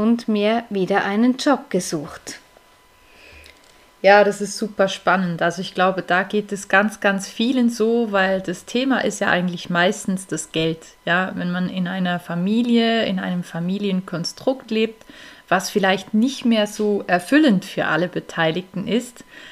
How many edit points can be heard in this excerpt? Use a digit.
0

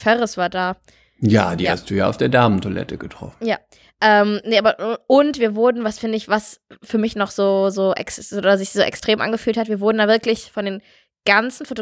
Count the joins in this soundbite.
0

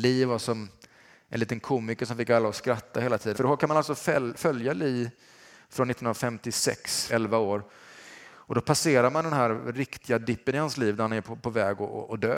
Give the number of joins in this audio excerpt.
2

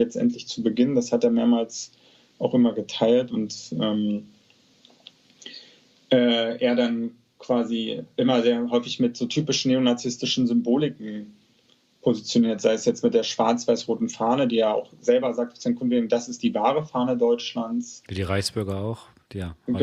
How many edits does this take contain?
0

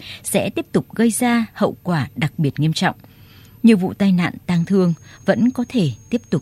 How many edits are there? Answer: 0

